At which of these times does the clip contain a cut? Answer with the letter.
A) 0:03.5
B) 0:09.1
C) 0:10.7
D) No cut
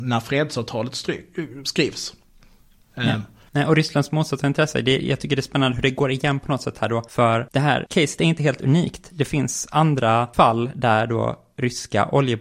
A